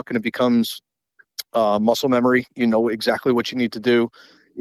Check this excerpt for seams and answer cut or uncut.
uncut